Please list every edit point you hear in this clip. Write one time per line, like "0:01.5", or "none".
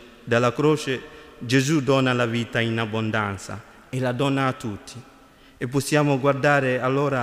none